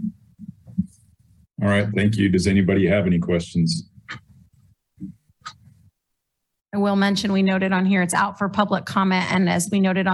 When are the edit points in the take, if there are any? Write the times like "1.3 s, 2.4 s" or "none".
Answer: none